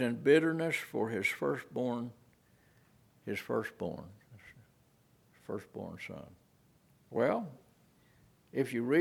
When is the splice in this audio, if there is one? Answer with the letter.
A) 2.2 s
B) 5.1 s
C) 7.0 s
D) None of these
C